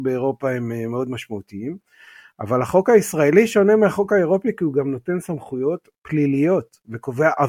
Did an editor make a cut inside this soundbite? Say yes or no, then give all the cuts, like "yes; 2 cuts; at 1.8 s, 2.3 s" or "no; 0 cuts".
no; 0 cuts